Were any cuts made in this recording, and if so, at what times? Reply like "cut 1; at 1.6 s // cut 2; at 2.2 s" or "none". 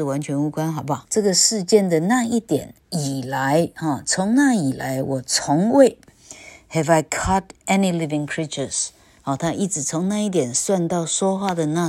cut 1; at 1.1 s